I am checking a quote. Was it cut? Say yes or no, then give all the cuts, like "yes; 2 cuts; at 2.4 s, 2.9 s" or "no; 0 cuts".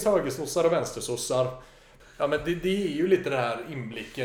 yes; 1 cut; at 2.0 s